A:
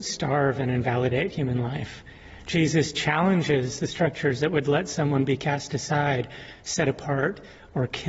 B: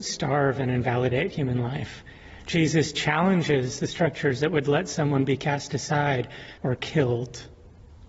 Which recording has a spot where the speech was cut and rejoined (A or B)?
B